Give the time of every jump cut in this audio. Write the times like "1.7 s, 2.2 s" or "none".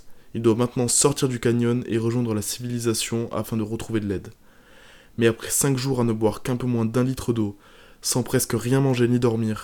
none